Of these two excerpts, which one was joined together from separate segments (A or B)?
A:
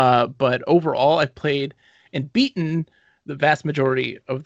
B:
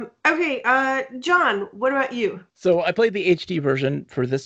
B